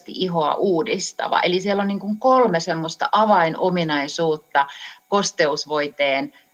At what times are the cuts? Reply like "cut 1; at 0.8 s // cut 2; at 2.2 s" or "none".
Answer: none

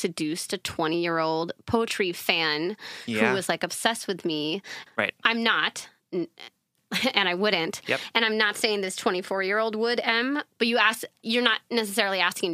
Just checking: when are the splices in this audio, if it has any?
cut 1; at 4.9 s

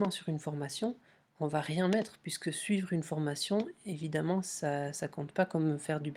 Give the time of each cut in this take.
none

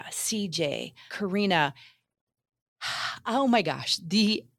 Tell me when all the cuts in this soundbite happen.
cut 1; at 1.1 s

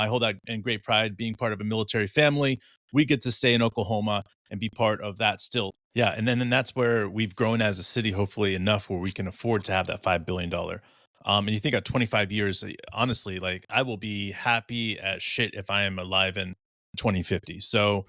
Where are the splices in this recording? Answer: cut 1; at 5.7 s // cut 2; at 13.7 s

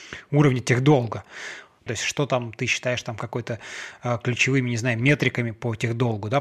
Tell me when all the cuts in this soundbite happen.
cut 1; at 1.9 s

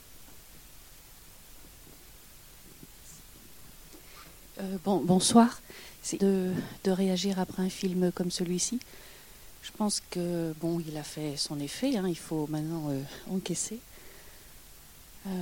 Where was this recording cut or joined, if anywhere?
cut 1; at 6.2 s

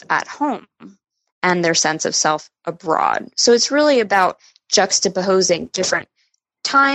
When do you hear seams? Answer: none

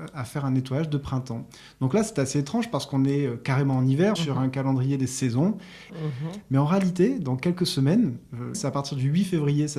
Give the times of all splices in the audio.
cut 1; at 4.1 s // cut 2; at 5.9 s // cut 3; at 8.5 s

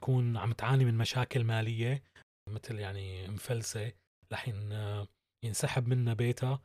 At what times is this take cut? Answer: none

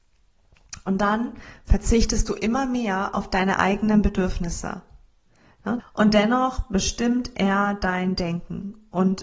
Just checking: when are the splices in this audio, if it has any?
cut 1; at 5.8 s

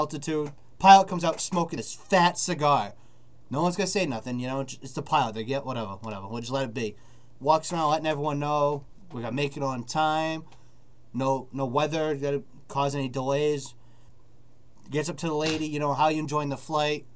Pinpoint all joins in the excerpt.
none

